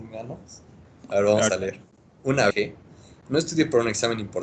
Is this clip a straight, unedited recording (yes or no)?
no